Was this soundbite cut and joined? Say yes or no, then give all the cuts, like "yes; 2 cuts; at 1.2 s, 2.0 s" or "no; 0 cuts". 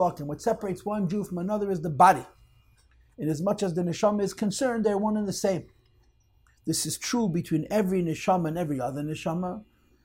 no; 0 cuts